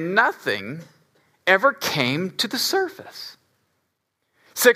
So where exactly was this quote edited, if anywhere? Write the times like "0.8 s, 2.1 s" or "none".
none